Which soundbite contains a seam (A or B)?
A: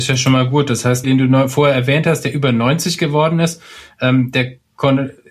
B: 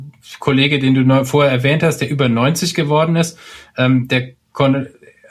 A